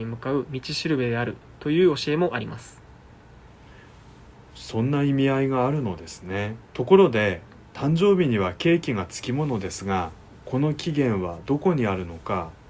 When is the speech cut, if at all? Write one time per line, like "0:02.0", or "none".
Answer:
0:06.7